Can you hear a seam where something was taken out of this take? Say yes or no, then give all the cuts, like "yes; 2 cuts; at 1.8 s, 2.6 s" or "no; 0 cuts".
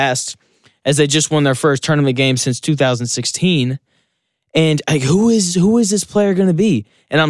no; 0 cuts